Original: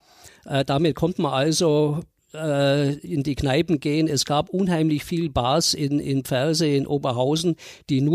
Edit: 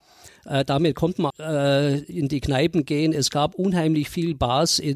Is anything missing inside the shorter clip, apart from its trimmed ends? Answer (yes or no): yes